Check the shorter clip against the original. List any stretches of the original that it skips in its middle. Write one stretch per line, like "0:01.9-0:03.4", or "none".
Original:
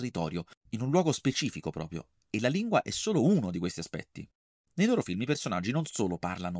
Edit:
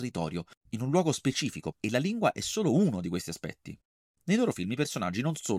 0:01.7-0:02.2